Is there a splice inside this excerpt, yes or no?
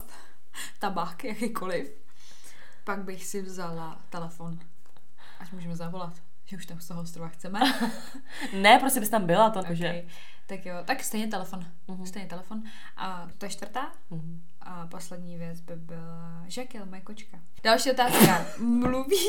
yes